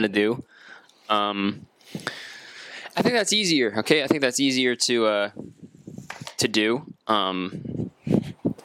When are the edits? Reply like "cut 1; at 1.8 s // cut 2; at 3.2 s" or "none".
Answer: none